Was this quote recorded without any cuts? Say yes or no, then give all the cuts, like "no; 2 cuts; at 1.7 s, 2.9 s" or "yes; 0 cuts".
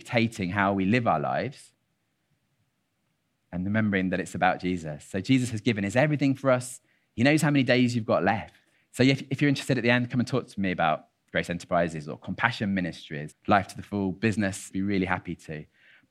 no; 3 cuts; at 8.7 s, 13.3 s, 14.7 s